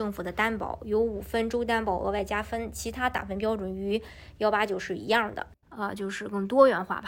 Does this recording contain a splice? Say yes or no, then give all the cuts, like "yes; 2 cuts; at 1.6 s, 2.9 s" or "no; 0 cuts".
yes; 1 cut; at 5.6 s